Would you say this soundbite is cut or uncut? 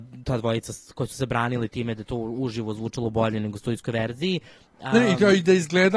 uncut